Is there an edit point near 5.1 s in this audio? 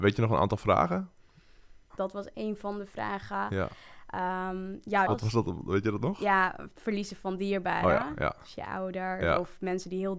yes; 2 cuts; at 1.9 s, 5.1 s

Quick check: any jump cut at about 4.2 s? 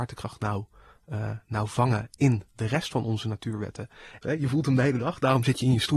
yes; 2 cuts; at 2.1 s, 4.2 s

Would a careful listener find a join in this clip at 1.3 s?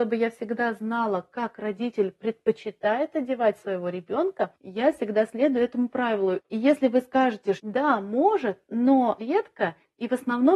no; 3 cuts; at 6.4 s, 7.6 s, 9.2 s

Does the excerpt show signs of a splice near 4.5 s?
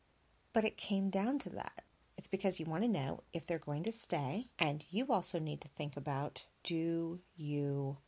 yes; 3 cuts; at 2.0 s, 4.5 s, 6.5 s

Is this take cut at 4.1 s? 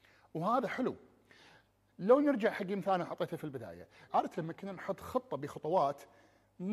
yes; 1 cut; at 4.1 s

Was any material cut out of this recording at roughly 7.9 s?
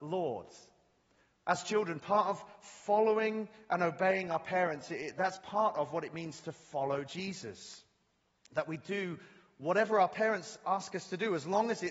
no; 0 cuts

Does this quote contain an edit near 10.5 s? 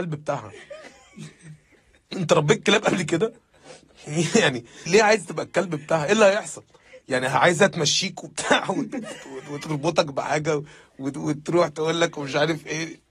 no; 2 cuts; at 4.9 s, 7.0 s

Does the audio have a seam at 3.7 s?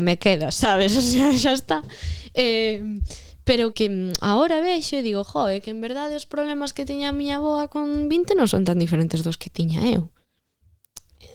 yes; 1 cut; at 3.7 s

